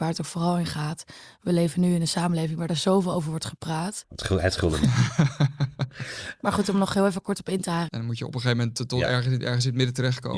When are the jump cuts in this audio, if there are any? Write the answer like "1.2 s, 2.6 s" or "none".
4.0 s, 7.9 s